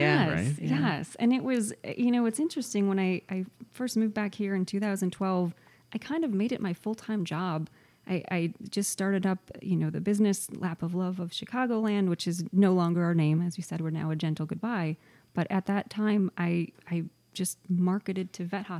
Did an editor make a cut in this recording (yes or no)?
no